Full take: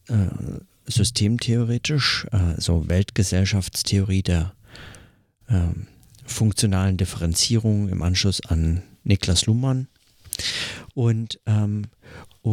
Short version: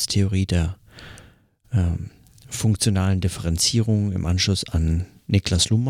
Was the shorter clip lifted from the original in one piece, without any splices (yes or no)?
yes